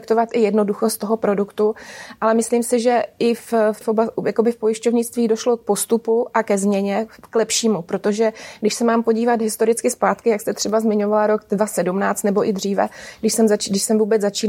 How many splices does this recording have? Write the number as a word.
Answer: one